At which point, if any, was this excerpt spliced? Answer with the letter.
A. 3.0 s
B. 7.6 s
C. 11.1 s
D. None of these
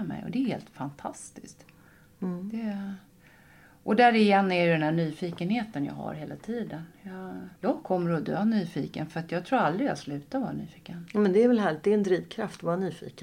B